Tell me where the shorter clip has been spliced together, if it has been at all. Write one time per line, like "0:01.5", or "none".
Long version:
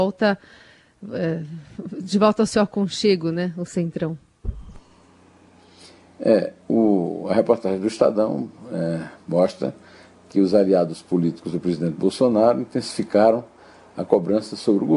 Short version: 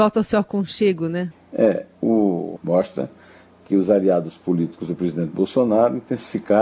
0:01.3
0:02.6